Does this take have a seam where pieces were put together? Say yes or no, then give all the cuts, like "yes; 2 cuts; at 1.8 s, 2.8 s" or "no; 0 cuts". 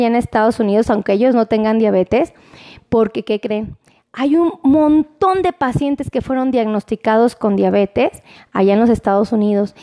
no; 0 cuts